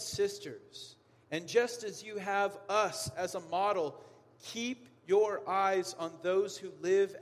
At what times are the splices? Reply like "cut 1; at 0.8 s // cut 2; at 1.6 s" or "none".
none